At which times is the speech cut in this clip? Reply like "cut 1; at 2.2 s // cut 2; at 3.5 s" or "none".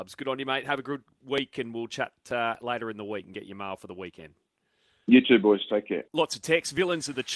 none